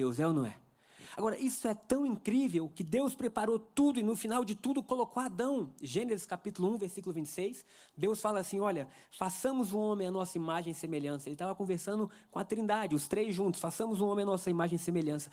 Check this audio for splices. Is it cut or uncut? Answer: uncut